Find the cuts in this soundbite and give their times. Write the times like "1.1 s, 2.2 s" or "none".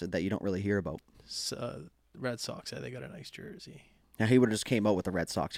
none

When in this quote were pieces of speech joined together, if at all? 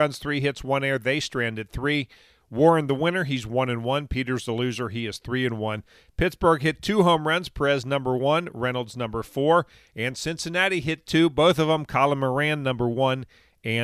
none

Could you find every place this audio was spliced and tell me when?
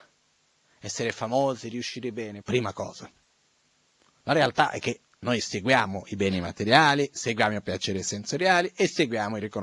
2.4 s, 5.1 s

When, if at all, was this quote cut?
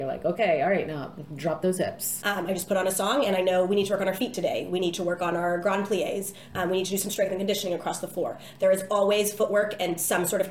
2.2 s

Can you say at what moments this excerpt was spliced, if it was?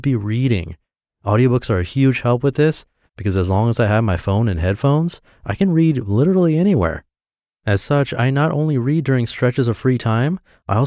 none

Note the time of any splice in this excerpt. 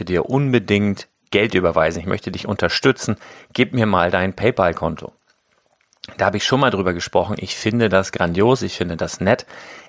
none

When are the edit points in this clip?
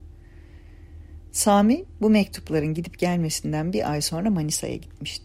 none

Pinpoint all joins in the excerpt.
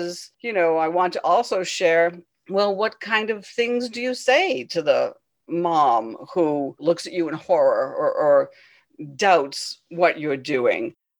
none

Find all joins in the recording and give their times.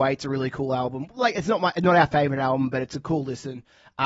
none

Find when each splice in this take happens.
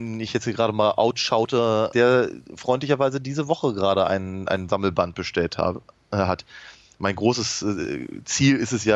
1.9 s

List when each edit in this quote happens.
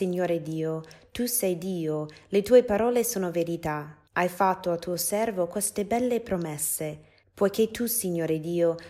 4.1 s, 7.2 s

